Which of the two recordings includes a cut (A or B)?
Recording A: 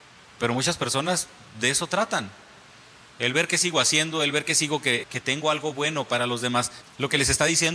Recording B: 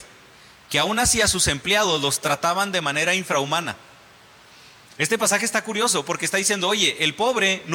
A